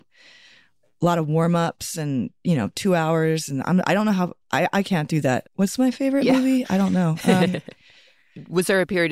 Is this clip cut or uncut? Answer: cut